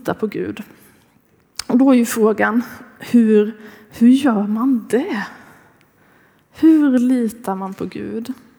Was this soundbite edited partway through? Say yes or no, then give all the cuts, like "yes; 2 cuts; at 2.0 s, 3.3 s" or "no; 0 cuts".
no; 0 cuts